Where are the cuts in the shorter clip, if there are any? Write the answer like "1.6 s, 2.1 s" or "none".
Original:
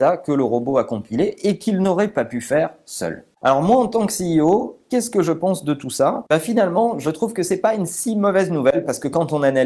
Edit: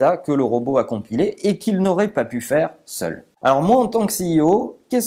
none